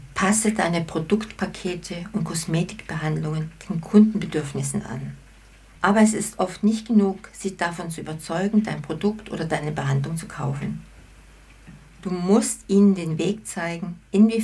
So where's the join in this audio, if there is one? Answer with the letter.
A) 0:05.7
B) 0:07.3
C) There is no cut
A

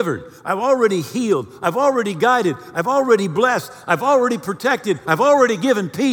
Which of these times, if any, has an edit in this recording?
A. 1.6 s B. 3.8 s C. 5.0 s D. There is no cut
C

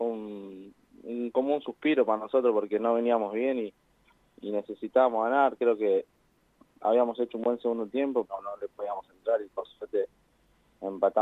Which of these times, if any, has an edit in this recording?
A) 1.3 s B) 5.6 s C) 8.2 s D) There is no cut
C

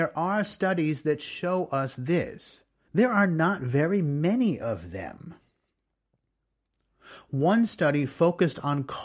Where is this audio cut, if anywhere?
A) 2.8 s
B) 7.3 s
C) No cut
A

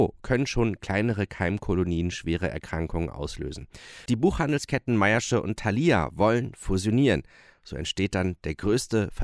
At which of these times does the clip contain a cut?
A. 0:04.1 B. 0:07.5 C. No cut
A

